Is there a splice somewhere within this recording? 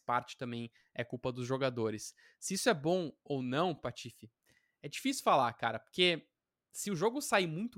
no; 0 cuts

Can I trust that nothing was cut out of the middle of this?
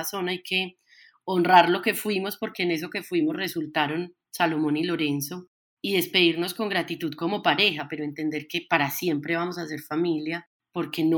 yes; 0 cuts

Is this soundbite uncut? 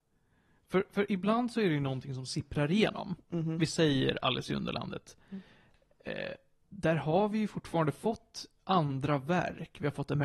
yes; 0 cuts

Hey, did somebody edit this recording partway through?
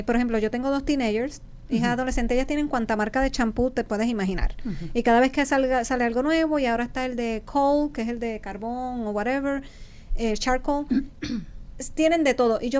no; 0 cuts

